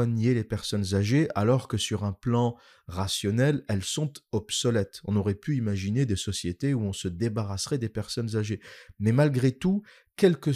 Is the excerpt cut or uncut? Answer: uncut